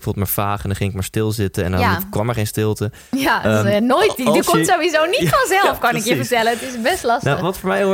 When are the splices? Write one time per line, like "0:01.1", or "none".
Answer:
none